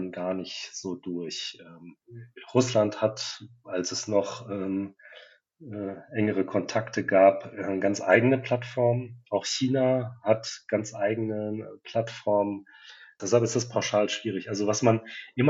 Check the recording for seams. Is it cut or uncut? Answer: cut